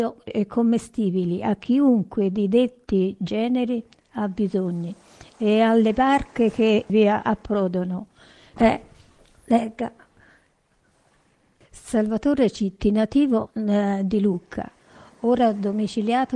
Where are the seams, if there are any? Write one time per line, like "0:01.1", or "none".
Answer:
0:08.6